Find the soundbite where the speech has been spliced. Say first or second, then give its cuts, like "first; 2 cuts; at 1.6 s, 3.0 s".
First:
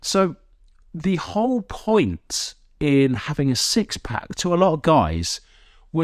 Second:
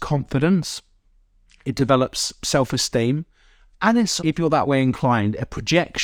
second; 1 cut; at 4.2 s